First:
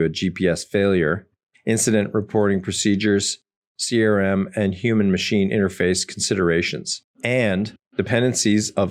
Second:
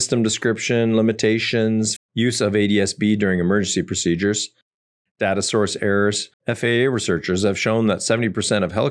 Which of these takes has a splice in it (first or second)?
second